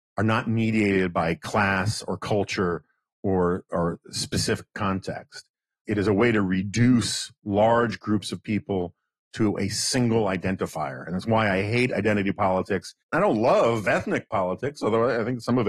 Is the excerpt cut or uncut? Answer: cut